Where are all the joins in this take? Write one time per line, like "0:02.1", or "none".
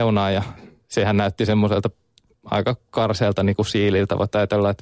none

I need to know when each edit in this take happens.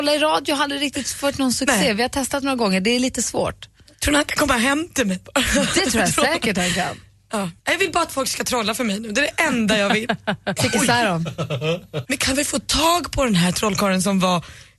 0:07.6
0:10.6
0:12.1

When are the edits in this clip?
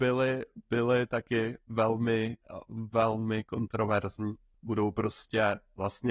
0:04.5

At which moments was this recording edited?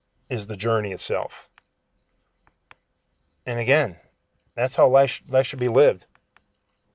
none

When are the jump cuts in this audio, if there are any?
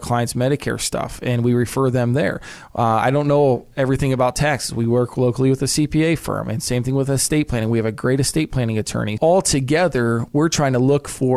0:09.2

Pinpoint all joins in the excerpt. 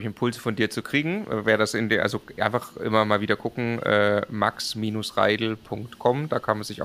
none

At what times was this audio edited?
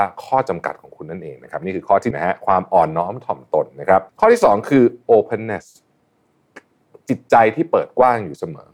0:02.1
0:04.1

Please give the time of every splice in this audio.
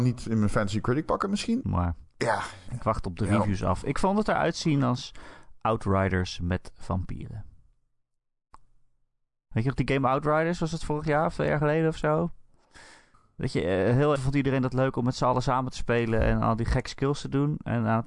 0:01.6
0:02.7
0:14.2

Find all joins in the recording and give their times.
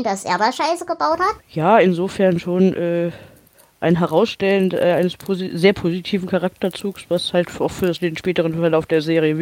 0:01.4

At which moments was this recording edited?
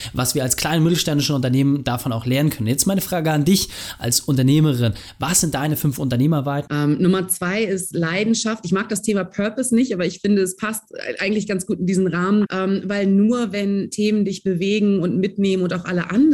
0:06.7
0:12.5

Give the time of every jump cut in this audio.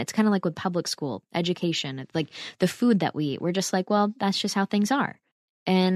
none

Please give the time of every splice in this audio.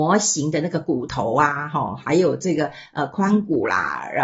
none

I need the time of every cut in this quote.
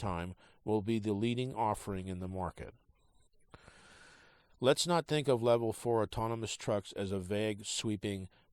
0:04.5

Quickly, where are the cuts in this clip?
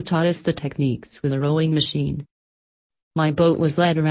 0:03.0

